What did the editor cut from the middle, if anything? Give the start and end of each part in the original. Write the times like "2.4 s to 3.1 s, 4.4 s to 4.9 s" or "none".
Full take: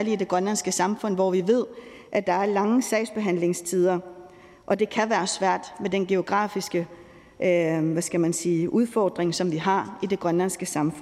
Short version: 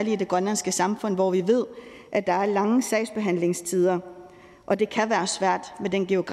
none